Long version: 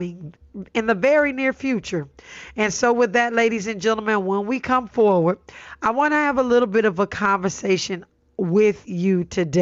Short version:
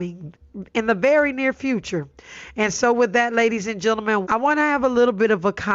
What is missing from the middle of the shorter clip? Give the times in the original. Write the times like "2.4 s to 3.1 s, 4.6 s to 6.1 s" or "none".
4.2 s to 5.8 s